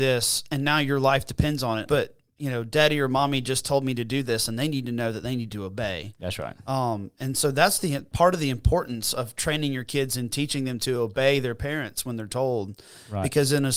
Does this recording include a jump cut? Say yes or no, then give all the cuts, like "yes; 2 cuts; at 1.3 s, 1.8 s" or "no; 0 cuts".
yes; 1 cut; at 1.8 s